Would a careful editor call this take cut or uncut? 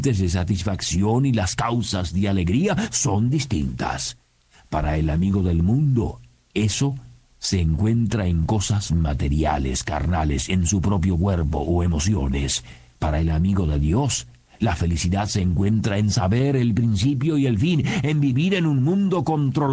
uncut